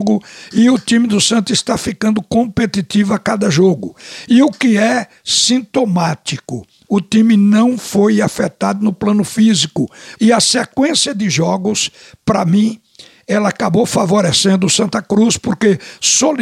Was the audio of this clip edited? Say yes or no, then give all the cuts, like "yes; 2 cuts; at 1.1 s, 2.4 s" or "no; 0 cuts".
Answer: yes; 1 cut; at 10.2 s